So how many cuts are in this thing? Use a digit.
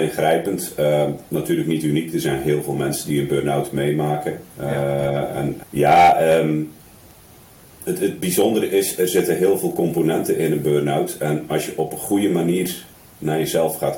1